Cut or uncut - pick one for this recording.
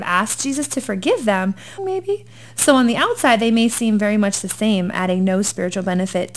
cut